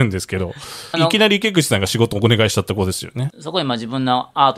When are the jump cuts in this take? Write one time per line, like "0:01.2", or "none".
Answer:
0:00.9
0:03.3